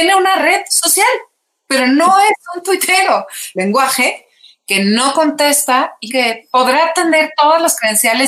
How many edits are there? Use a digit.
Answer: 2